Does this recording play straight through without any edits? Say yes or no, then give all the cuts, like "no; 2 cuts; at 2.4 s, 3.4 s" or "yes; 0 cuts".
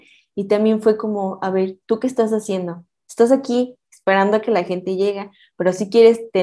yes; 0 cuts